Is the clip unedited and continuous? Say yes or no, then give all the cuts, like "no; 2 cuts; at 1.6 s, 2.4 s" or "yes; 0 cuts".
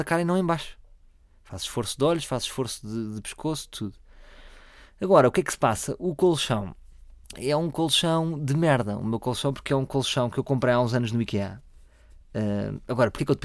no; 1 cut; at 7.2 s